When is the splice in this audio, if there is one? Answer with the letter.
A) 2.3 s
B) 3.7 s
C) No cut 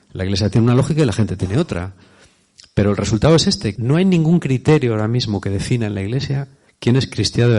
B